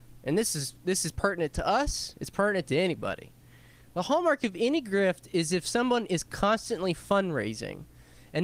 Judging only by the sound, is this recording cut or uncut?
uncut